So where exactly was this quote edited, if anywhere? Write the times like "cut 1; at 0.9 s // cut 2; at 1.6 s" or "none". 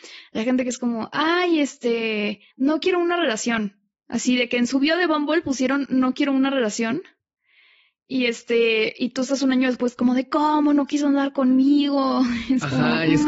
cut 1; at 2.5 s